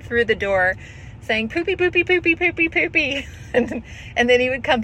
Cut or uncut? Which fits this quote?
uncut